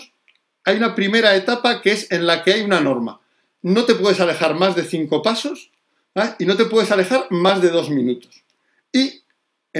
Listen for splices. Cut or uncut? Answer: uncut